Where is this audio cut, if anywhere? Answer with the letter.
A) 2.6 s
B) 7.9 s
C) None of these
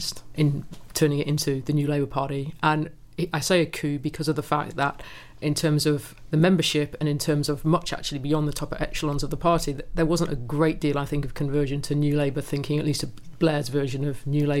C